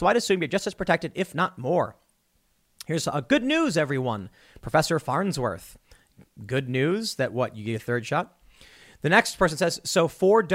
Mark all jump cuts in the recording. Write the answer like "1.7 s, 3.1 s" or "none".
none